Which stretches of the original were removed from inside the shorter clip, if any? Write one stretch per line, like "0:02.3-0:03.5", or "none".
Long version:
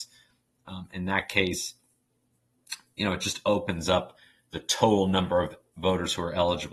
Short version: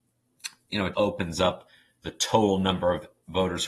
0:03.2-0:03.4